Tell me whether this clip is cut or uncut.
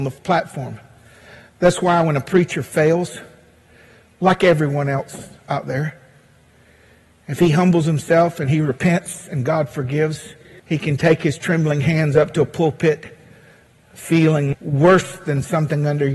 cut